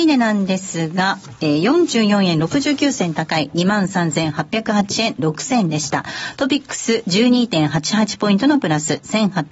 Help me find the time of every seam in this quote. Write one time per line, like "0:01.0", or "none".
none